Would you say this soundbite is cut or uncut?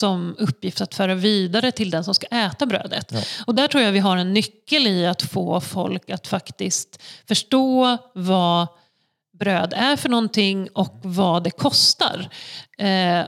uncut